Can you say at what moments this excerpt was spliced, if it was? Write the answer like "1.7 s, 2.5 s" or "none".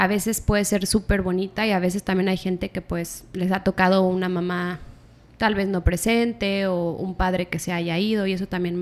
none